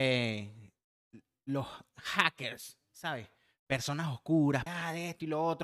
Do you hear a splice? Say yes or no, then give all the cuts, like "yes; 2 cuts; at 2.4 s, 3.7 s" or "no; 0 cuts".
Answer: yes; 1 cut; at 4.7 s